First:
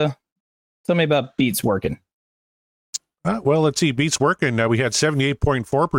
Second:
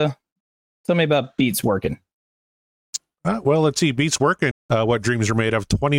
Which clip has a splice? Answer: second; 1 cut; at 4.5 s

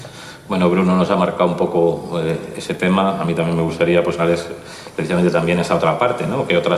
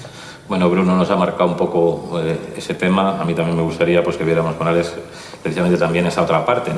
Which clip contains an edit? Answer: first; 1 cut; at 4.2 s

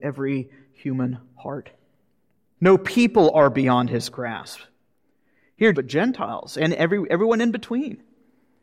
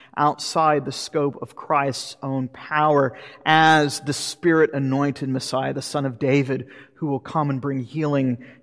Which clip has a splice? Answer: first; 2 cuts; at 2.6 s, 5.7 s

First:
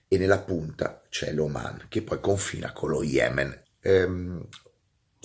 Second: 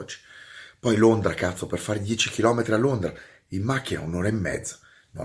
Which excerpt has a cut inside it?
first; 1 cut; at 3.6 s

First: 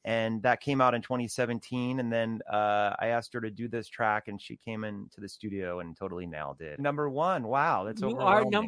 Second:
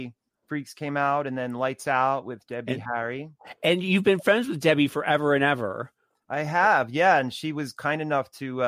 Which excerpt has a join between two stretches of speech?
first; 1 cut; at 6.8 s

